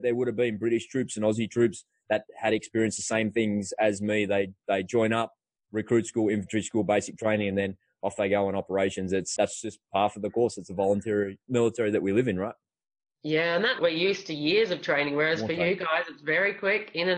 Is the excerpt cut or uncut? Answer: cut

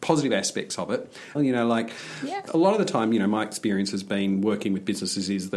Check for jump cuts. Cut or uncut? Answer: cut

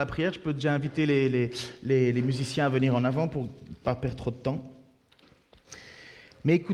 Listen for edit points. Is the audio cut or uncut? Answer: uncut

